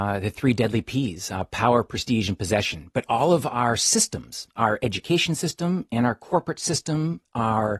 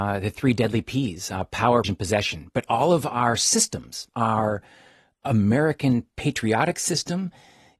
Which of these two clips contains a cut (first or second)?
second